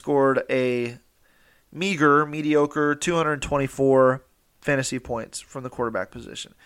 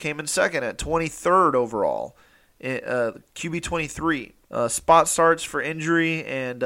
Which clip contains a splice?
second; 1 cut; at 4.4 s

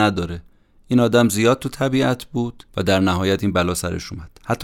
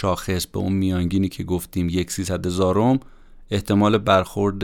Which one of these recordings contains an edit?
first; 1 cut; at 2.7 s

